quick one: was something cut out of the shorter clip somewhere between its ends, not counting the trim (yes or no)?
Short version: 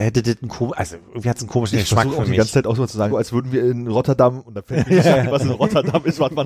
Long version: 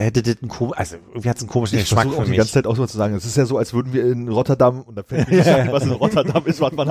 yes